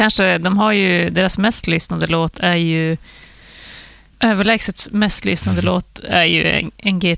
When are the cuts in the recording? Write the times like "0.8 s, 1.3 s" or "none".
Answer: 4.1 s